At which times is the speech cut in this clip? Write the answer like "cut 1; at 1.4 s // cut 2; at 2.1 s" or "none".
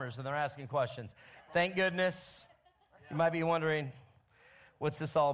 cut 1; at 1.4 s